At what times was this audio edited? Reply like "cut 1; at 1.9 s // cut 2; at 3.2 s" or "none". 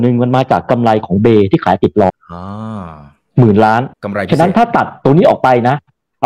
cut 1; at 2.1 s // cut 2; at 3.9 s